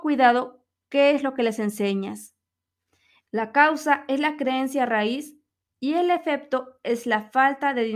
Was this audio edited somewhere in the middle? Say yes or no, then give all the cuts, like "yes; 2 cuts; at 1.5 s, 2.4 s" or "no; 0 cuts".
yes; 1 cut; at 3.3 s